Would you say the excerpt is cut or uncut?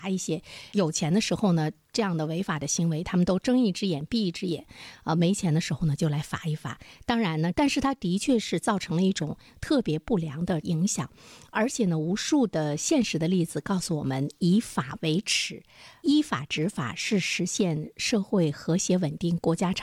cut